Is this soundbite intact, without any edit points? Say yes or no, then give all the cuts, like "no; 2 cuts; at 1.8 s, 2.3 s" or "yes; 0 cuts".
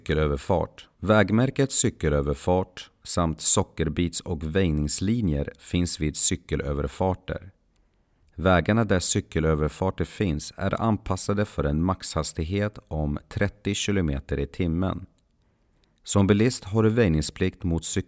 no; 1 cut; at 0.9 s